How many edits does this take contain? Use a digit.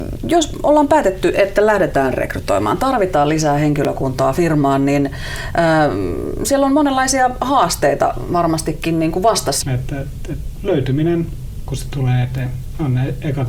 2